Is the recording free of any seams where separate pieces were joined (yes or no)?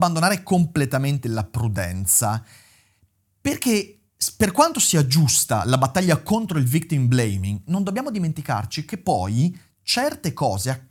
yes